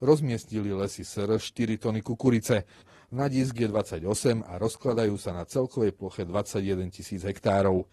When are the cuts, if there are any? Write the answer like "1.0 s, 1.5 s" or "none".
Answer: 2.8 s